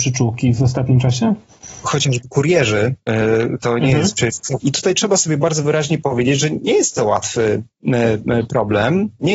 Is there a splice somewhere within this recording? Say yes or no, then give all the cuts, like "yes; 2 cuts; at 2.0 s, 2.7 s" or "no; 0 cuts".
yes; 2 cuts; at 1.8 s, 4.6 s